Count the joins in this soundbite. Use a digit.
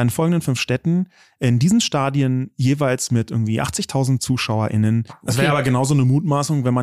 1